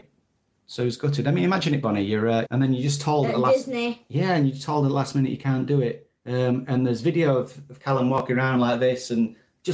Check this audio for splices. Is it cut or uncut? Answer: cut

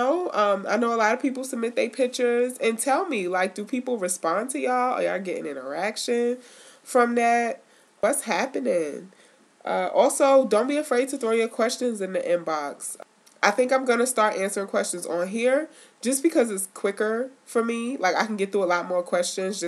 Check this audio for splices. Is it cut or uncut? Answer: uncut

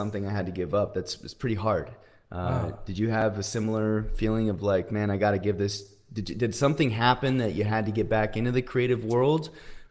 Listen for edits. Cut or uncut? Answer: uncut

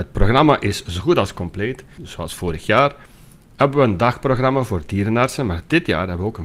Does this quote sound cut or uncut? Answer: cut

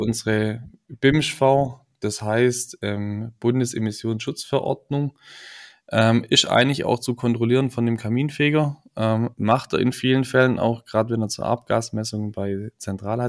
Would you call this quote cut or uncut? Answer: uncut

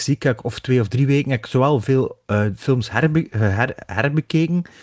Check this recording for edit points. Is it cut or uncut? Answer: uncut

